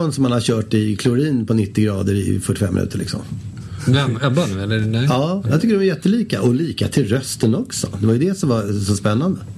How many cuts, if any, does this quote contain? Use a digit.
1